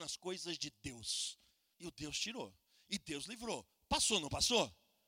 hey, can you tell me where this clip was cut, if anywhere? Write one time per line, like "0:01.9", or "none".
0:01.7